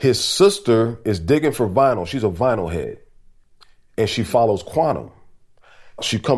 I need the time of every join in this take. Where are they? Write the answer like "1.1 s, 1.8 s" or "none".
none